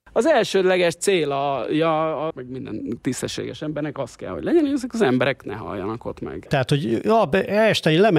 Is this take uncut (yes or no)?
no